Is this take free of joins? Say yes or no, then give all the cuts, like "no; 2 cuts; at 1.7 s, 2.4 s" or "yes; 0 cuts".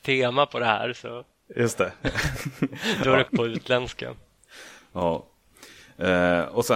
no; 1 cut; at 3.2 s